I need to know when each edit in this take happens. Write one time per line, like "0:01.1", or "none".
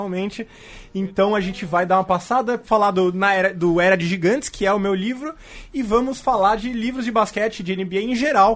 none